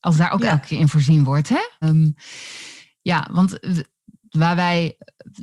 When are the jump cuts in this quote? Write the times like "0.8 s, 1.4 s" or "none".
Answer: 1.8 s